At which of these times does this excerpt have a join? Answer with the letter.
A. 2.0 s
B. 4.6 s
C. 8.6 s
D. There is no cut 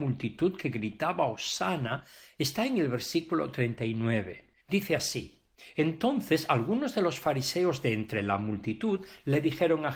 B